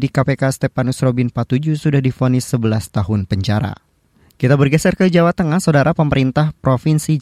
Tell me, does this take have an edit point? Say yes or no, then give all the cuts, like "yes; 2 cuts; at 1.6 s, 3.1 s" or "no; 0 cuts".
no; 0 cuts